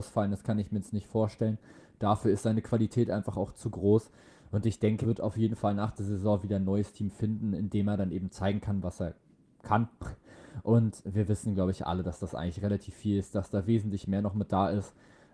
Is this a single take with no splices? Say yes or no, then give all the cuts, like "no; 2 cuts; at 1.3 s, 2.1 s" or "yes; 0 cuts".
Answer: no; 1 cut; at 5.0 s